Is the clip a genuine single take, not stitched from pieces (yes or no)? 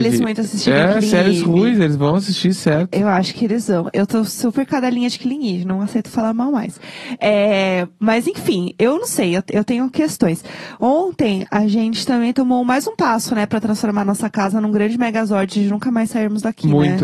yes